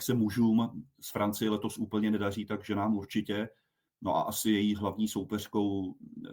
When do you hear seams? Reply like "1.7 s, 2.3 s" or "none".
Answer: none